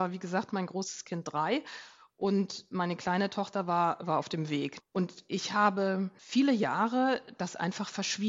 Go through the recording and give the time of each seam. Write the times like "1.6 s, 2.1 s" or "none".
none